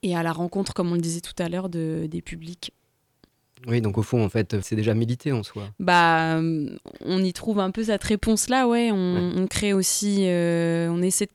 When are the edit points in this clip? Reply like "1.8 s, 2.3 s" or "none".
4.6 s